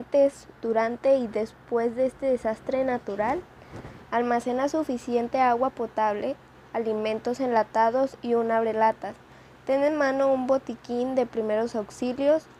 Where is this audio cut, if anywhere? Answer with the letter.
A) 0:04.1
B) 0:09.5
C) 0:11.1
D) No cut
A